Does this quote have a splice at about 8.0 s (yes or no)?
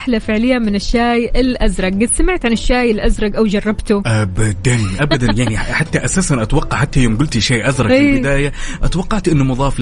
no